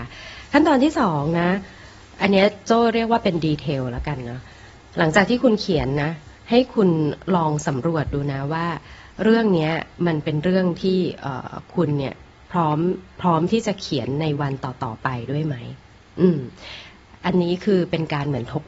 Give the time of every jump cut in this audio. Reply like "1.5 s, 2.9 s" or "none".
none